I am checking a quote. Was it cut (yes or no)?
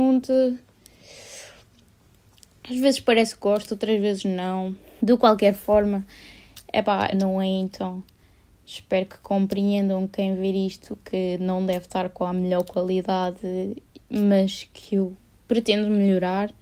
yes